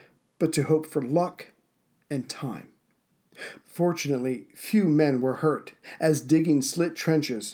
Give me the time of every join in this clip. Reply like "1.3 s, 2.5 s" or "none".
3.6 s